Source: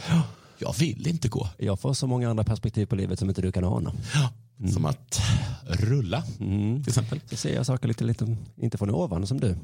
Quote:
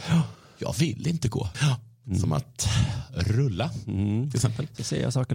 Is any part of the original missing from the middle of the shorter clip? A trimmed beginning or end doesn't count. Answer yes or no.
yes